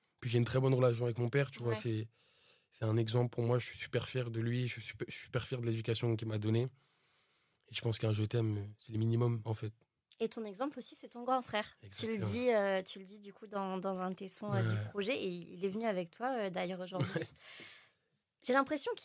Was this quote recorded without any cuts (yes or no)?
no